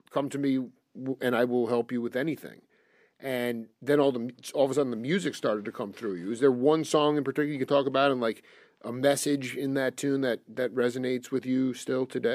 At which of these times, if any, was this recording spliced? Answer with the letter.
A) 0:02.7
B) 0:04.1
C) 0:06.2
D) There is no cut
D